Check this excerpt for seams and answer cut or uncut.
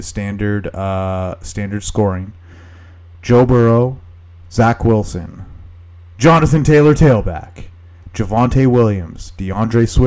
uncut